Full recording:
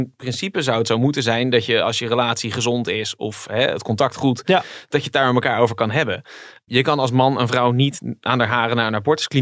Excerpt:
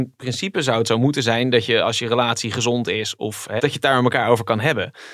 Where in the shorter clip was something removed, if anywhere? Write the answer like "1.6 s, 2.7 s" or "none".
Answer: 3.6 s